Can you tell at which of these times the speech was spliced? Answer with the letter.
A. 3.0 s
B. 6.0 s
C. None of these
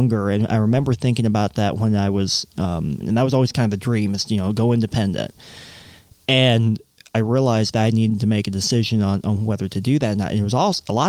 A